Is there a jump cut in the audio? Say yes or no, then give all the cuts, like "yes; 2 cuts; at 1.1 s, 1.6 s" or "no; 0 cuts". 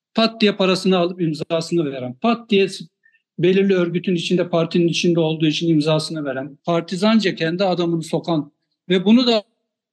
yes; 1 cut; at 6.6 s